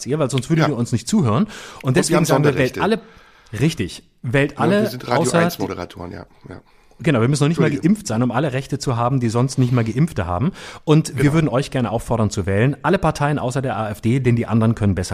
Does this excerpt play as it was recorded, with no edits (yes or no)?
yes